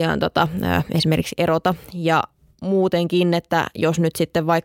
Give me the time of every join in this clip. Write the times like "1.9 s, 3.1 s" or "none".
none